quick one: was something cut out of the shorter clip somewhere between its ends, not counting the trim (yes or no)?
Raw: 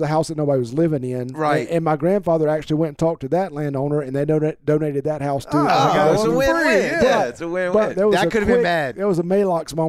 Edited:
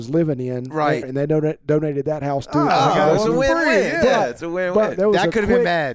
yes